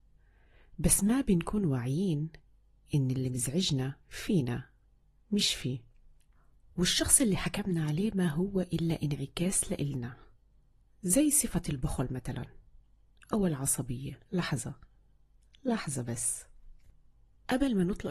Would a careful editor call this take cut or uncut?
cut